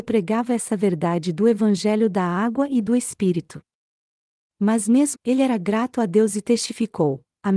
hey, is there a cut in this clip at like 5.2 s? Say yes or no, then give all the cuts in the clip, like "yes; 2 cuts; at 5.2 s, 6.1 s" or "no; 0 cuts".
yes; 1 cut; at 5.2 s